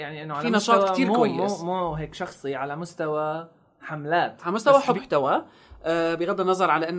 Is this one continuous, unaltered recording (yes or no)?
no